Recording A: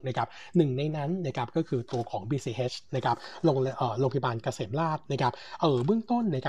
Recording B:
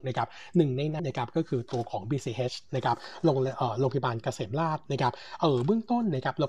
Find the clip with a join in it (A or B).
B